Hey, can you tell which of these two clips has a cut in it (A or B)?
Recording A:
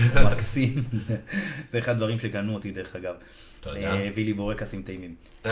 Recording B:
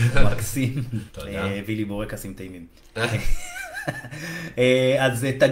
B